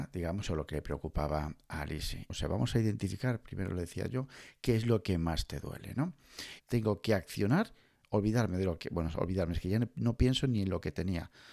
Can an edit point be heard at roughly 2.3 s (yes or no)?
yes